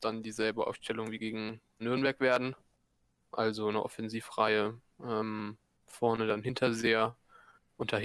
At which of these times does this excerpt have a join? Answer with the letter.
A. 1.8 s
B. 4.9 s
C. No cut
A